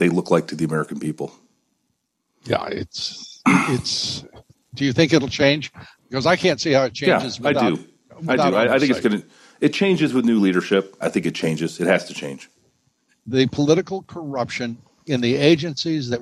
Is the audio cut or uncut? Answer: cut